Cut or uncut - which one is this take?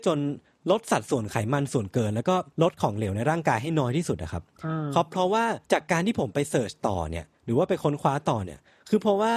cut